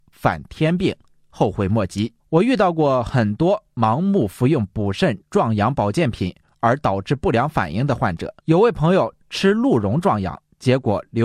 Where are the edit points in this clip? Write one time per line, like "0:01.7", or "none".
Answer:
0:02.2
0:08.4